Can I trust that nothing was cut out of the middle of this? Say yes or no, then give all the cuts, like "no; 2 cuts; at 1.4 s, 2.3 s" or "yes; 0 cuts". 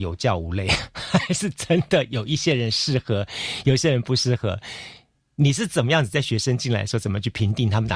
yes; 0 cuts